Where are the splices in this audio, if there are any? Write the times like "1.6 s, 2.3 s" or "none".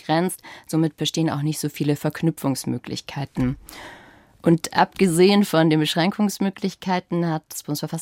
none